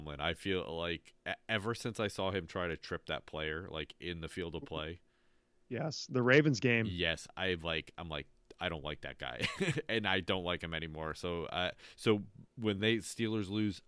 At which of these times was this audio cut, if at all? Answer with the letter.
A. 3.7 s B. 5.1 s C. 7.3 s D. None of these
D